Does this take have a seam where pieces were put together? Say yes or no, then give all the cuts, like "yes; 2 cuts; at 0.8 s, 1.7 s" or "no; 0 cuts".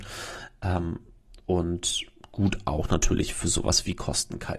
no; 0 cuts